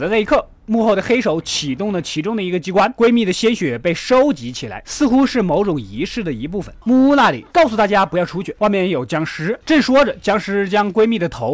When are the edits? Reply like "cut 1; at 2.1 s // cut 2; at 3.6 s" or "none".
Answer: cut 1; at 4.8 s // cut 2; at 7.5 s